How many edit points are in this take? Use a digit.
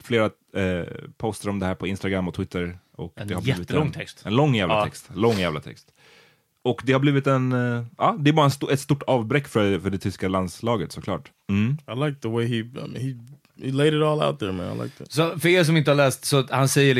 1